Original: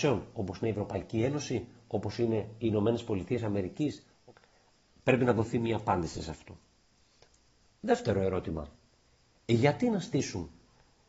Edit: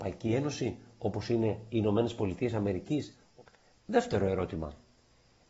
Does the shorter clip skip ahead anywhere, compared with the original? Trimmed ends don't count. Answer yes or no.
yes